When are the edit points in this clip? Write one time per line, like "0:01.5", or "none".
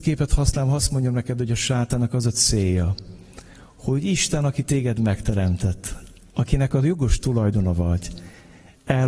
none